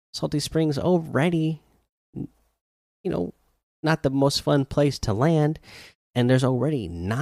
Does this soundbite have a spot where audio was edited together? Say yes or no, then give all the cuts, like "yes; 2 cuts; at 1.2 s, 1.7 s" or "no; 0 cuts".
no; 0 cuts